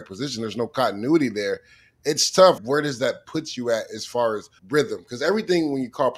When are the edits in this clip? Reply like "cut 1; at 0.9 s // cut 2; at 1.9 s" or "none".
cut 1; at 2.6 s // cut 2; at 4.6 s